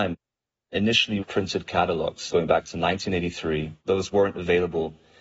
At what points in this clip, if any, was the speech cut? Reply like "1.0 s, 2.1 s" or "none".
1.2 s

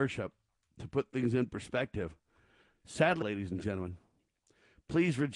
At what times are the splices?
3.2 s

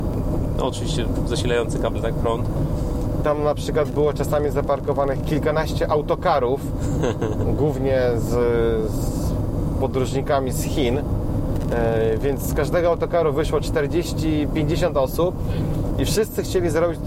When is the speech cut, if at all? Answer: 3.2 s

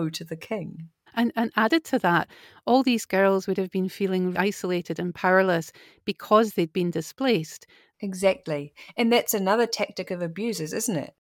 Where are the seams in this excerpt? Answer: 1.1 s, 4.3 s, 7.9 s

